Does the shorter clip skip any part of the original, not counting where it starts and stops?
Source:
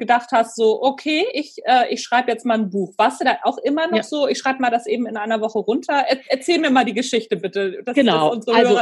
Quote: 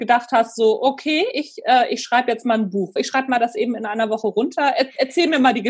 yes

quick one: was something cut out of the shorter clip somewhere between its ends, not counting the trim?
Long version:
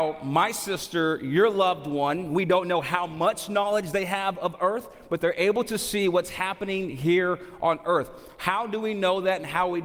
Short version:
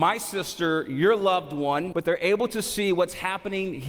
yes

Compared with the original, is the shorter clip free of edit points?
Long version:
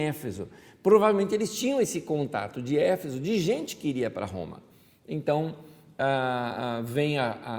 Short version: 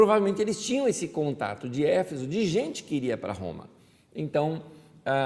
yes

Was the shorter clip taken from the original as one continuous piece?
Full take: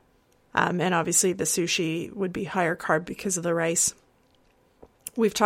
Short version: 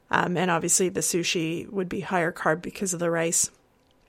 yes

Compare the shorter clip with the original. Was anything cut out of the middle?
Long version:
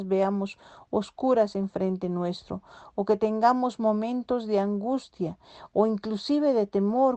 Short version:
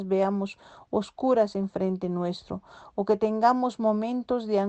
no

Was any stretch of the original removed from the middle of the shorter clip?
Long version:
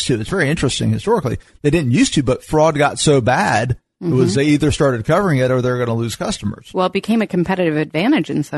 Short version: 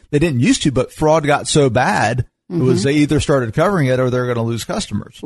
no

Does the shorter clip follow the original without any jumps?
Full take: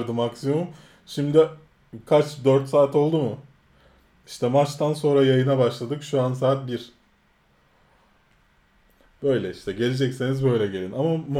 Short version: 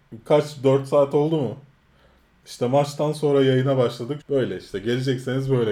no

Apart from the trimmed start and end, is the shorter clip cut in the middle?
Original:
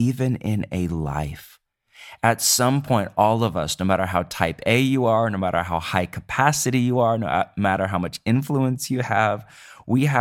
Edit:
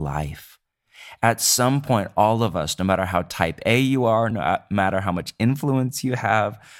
yes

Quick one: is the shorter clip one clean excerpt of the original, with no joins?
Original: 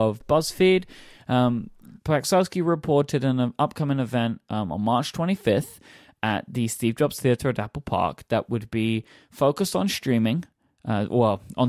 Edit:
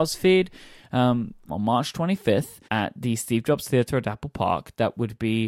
no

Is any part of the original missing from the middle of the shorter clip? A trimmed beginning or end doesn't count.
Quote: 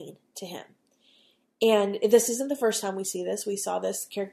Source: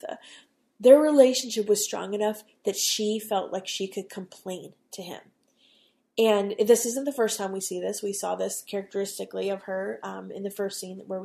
no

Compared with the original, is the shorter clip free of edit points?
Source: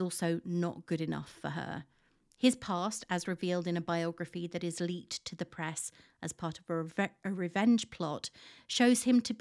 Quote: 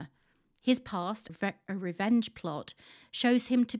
no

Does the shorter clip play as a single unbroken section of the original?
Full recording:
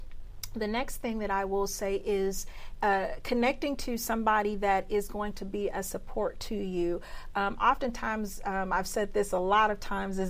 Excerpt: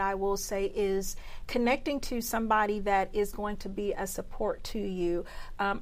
no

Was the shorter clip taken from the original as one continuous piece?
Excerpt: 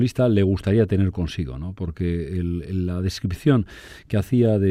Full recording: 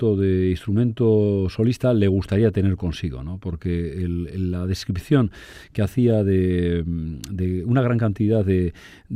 yes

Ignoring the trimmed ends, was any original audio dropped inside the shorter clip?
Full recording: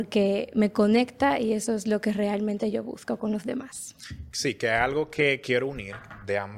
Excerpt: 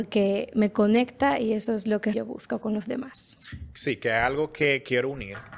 yes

